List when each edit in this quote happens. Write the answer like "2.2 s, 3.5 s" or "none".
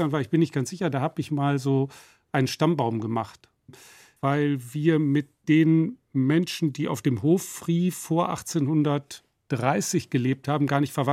4.2 s